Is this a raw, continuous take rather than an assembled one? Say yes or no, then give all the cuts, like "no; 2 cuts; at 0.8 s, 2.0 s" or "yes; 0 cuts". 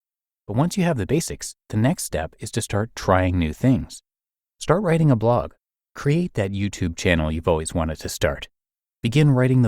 yes; 0 cuts